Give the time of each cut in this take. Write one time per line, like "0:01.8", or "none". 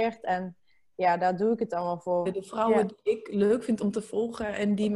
0:02.3